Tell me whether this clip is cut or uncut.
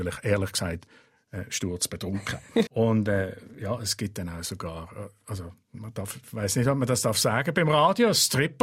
cut